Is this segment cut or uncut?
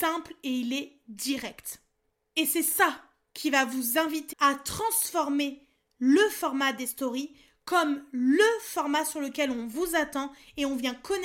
cut